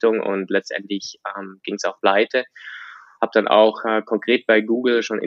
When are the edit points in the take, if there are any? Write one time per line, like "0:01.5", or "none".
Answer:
0:03.2